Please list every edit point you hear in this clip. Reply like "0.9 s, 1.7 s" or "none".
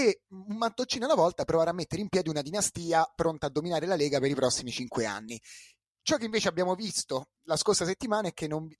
none